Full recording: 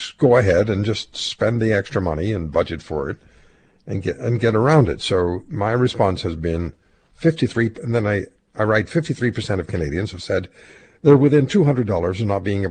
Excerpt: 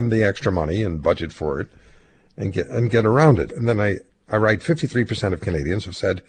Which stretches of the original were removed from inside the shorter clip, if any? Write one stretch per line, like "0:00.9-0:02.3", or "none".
0:05.0-0:07.8